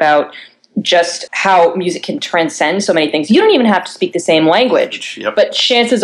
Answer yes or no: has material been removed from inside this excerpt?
yes